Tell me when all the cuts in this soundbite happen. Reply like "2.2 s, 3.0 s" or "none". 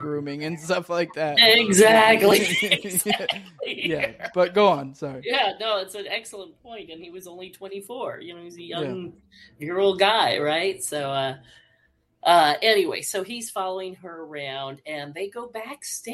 none